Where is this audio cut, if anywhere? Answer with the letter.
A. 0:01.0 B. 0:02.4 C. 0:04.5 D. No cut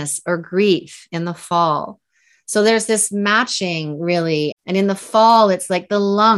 C